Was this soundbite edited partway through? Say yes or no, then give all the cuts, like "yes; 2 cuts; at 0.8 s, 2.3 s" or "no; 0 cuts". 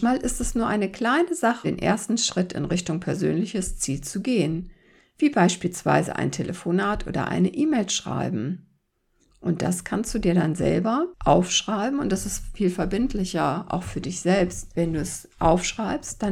yes; 1 cut; at 1.6 s